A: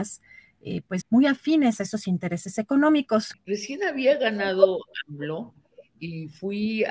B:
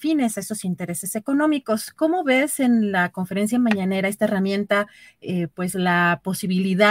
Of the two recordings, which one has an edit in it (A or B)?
A